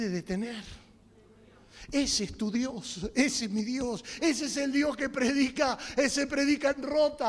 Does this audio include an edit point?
yes; 1 cut; at 4.2 s

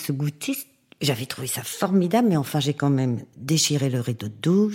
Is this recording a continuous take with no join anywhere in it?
no; 1 cut; at 3.3 s

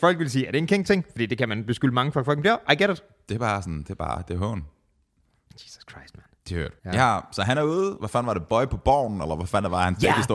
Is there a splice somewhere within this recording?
yes; 2 cuts; at 6.8 s, 8.0 s

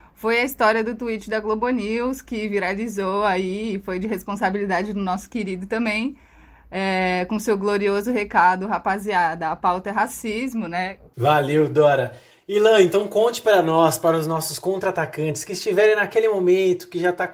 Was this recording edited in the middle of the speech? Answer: yes; 1 cut; at 11.1 s

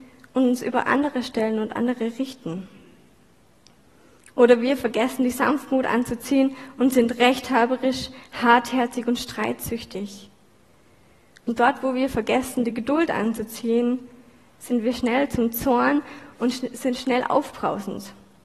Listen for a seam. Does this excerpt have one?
no; 0 cuts

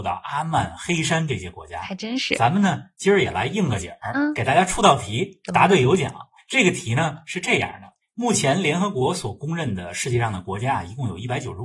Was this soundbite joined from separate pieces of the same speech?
no; 0 cuts

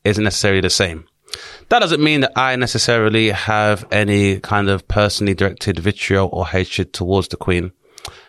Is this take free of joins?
yes; 0 cuts

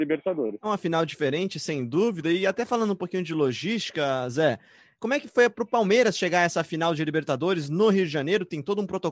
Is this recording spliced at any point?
no; 0 cuts

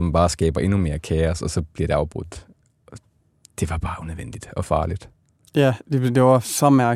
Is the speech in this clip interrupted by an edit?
no; 0 cuts

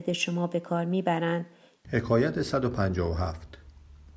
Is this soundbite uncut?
no; 1 cut; at 1.8 s

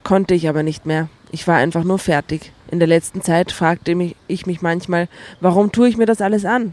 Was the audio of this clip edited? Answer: yes; 1 cut; at 2.6 s

